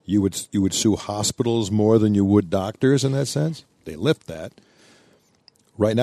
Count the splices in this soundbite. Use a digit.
1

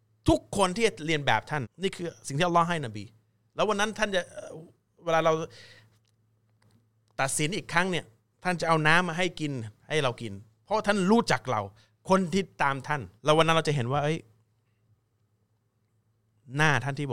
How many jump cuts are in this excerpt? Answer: 2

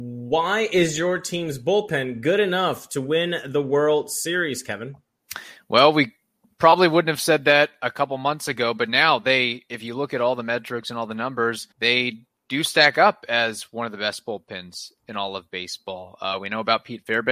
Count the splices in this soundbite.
1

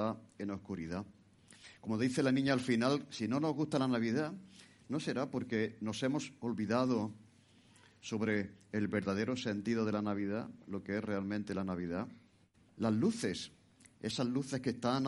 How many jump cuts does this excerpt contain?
1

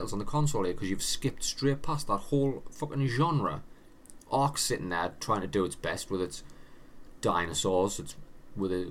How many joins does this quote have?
0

